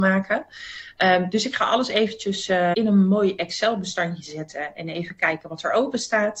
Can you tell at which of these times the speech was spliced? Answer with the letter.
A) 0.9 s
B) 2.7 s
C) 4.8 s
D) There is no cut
B